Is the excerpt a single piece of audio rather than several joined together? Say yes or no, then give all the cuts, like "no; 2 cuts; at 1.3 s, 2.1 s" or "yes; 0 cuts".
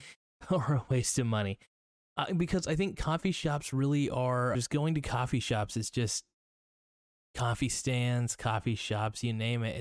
no; 1 cut; at 4.5 s